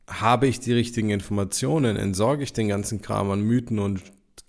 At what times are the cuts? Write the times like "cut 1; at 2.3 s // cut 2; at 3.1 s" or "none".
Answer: none